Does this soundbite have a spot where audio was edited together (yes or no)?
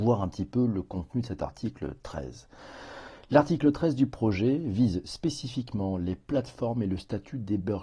no